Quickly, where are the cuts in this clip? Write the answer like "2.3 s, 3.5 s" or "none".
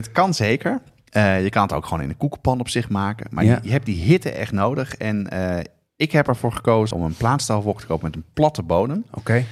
6.9 s